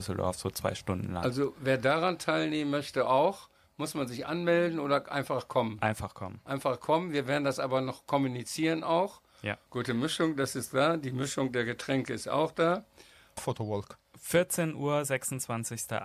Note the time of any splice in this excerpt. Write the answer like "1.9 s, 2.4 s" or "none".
9.7 s, 13.4 s